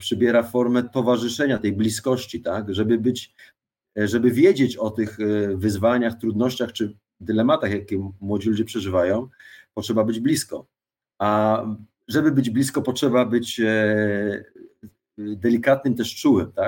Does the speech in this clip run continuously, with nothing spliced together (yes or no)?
yes